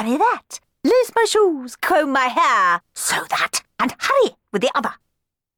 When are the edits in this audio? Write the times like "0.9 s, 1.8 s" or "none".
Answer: 2.9 s